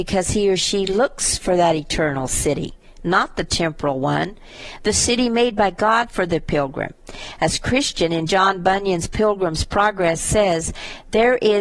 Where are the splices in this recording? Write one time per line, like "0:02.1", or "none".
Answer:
none